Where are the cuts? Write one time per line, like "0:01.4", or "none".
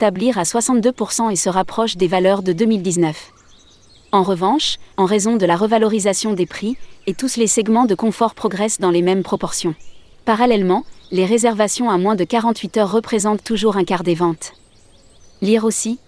0:04.9
0:10.1